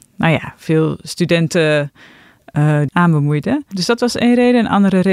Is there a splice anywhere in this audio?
yes; 1 cut; at 2.9 s

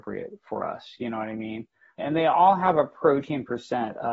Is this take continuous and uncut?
no; 1 cut; at 2.0 s

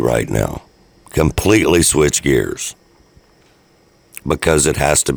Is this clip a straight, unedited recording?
yes; 0 cuts

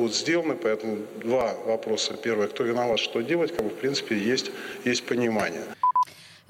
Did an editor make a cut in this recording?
no; 0 cuts

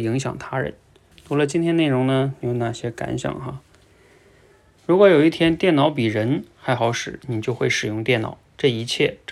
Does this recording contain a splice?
yes; 2 cuts; at 1.1 s, 4.8 s

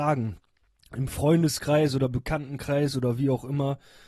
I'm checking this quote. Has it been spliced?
no; 0 cuts

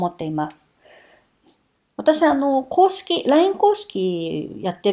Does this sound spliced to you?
no; 0 cuts

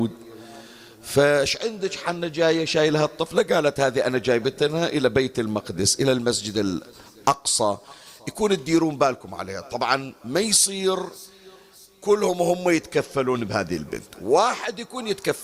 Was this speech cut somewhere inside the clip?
no; 0 cuts

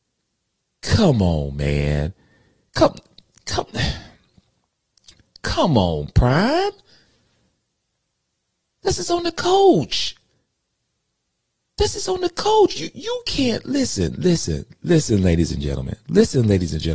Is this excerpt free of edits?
yes; 0 cuts

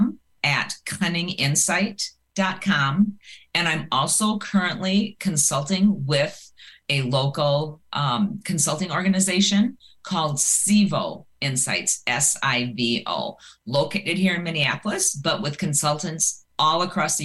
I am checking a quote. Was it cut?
no; 0 cuts

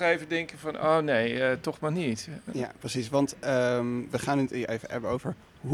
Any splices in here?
no; 0 cuts

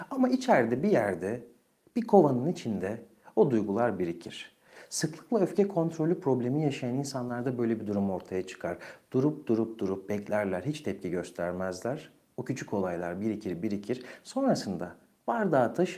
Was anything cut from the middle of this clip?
no; 0 cuts

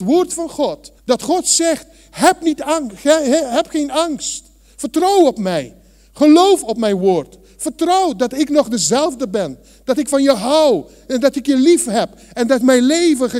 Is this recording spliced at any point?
yes; 1 cut; at 1.0 s

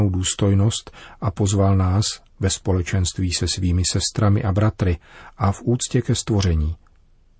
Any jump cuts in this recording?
yes; 1 cut; at 2.3 s

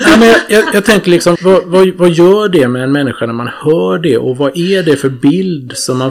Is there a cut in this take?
yes; 1 cut; at 1.4 s

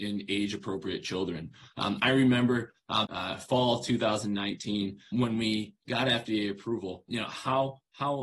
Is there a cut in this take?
yes; 3 cuts; at 3.0 s, 5.1 s, 7.1 s

